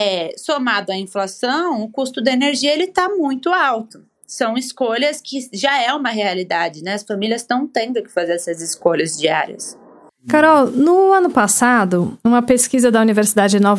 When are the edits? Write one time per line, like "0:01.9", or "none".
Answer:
none